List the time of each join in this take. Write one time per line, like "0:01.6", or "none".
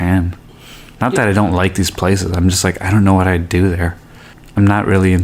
none